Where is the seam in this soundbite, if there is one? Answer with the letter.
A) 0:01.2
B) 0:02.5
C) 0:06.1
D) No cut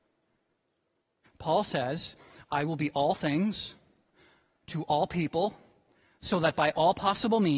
A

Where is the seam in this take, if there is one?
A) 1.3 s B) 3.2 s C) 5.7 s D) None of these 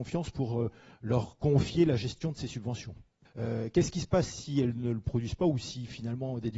B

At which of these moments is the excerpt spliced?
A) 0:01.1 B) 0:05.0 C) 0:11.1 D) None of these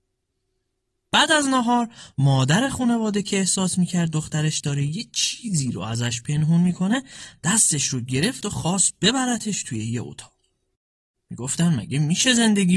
C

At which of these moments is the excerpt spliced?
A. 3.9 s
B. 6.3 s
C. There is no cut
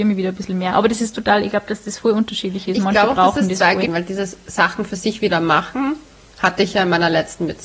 A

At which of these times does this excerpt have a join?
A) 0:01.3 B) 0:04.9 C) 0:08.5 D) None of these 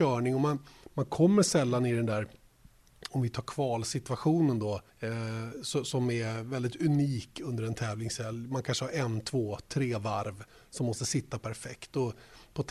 B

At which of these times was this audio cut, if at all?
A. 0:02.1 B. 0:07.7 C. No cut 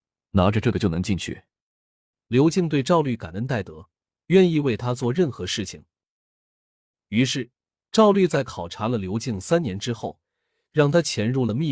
A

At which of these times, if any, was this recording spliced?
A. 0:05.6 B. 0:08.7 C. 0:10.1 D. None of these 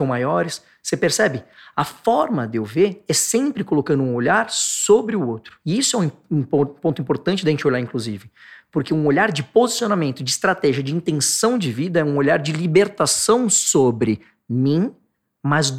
A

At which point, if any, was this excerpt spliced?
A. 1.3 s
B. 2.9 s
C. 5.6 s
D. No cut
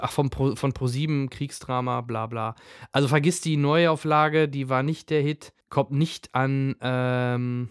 C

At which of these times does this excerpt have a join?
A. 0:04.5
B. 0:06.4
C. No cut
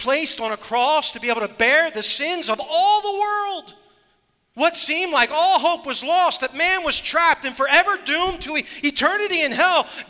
A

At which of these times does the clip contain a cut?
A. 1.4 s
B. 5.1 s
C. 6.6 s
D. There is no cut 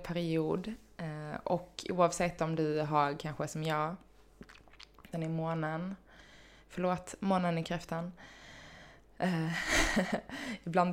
B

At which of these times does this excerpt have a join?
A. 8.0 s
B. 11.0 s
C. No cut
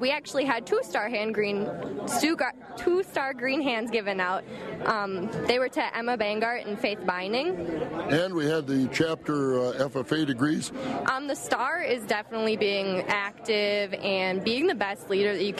B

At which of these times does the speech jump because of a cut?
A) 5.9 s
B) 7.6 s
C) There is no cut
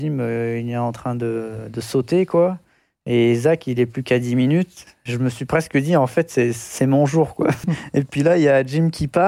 B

